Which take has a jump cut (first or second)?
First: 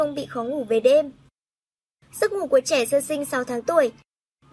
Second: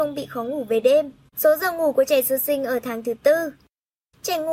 second